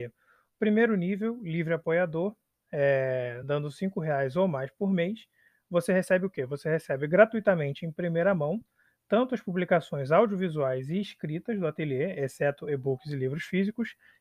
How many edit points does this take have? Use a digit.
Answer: 0